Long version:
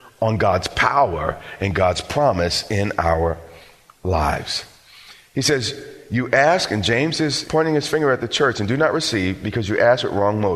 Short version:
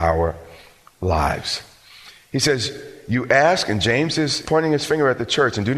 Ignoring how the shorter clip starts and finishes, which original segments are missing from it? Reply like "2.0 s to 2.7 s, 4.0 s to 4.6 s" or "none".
none

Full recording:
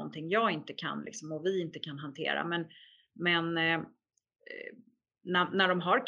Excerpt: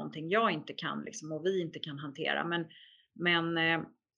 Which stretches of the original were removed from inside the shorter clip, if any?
none

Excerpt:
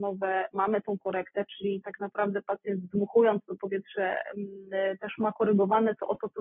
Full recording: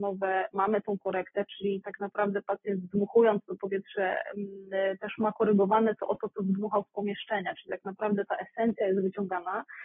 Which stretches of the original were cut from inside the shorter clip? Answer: none

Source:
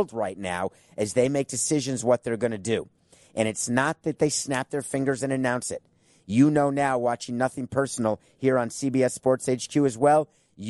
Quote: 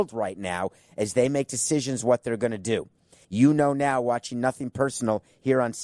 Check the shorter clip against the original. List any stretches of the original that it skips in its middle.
3.2 s to 6.2 s

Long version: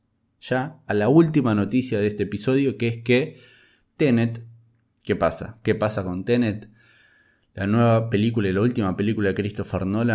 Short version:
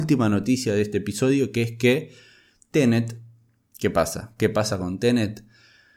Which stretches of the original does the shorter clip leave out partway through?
none

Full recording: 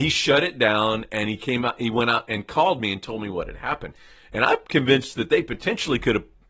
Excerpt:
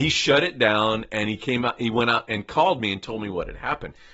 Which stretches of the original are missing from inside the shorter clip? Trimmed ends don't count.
none

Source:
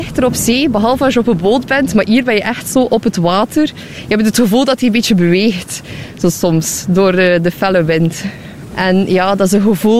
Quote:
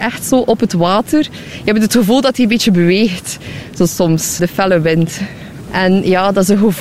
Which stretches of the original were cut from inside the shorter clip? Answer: 6.8 s to 7.4 s

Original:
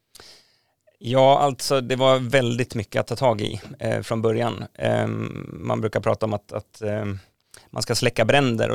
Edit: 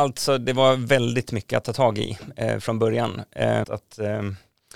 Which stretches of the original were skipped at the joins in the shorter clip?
5.1 s to 6.5 s

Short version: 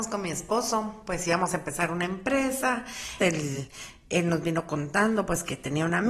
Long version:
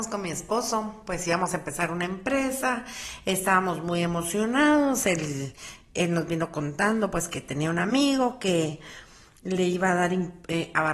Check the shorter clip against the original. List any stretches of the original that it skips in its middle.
3.2 s to 5.0 s

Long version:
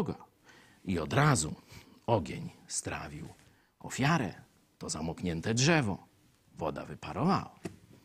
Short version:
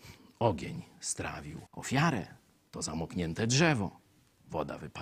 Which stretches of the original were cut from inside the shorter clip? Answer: 3.3 s to 3.7 s

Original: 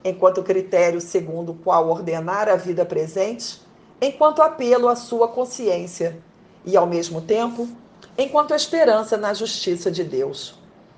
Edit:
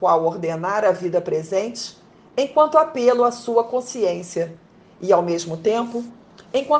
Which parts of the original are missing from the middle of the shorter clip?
none

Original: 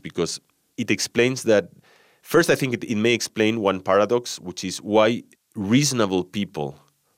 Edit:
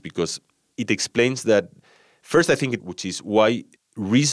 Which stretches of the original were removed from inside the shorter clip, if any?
2.8 s to 4.4 s

